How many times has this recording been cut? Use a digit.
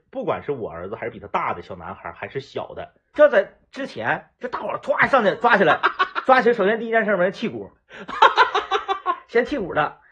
1